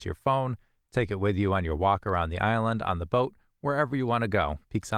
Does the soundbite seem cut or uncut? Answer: uncut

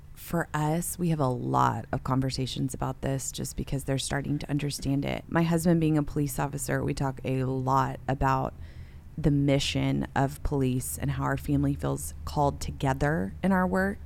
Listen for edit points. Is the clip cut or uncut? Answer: cut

